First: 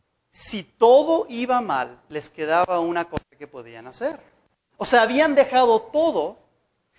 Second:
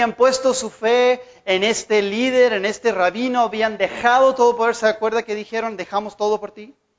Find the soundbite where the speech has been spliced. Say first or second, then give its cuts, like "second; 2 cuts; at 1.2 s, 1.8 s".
first; 1 cut; at 4.7 s